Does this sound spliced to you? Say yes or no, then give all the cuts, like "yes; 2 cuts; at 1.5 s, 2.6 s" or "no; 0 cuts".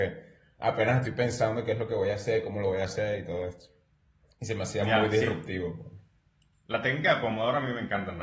no; 0 cuts